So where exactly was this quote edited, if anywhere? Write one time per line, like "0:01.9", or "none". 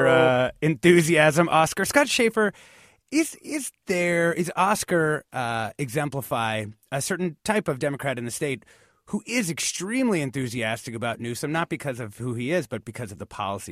none